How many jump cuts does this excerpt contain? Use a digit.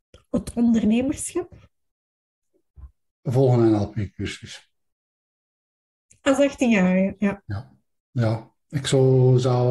0